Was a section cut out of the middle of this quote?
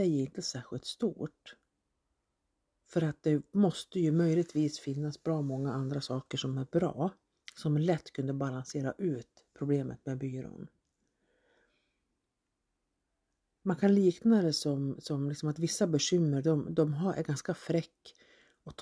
no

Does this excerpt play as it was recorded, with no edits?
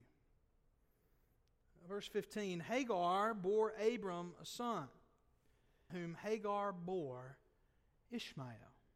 no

